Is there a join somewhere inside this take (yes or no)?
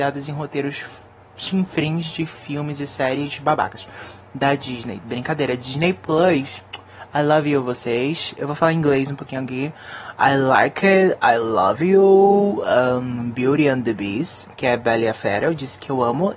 no